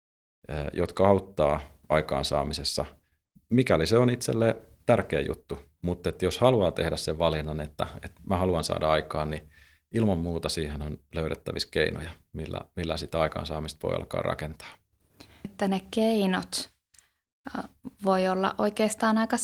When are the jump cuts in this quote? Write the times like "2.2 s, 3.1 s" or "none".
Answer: 5.8 s